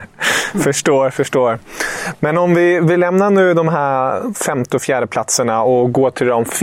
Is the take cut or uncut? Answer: uncut